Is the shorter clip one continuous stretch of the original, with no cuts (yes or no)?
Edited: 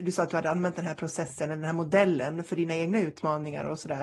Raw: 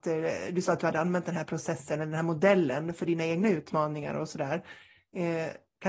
yes